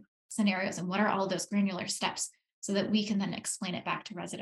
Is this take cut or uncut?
uncut